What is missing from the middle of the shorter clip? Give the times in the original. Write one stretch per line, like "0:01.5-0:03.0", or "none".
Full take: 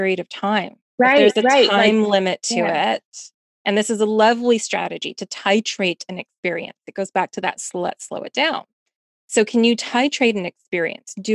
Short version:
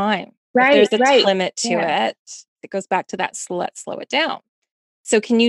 0:01.7-0:02.1
0:03.4-0:06.8